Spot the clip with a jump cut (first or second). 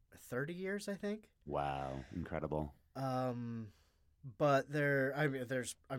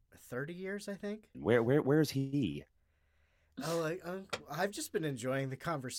second